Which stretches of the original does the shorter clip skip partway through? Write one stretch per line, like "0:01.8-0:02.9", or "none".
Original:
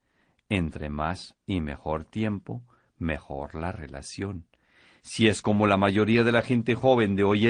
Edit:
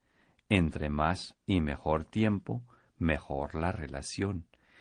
none